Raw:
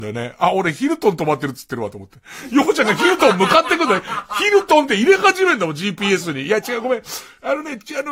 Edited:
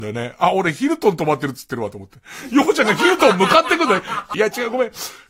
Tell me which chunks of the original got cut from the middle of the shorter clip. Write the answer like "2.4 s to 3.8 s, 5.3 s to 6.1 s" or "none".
4.3 s to 6.4 s